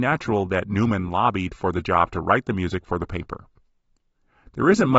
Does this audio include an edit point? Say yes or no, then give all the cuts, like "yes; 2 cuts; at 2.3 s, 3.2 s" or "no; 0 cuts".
no; 0 cuts